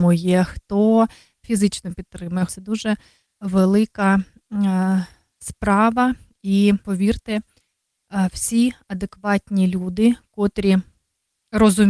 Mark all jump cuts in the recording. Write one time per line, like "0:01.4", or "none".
0:02.5
0:06.8